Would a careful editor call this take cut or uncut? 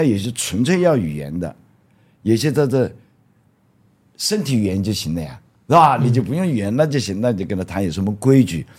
uncut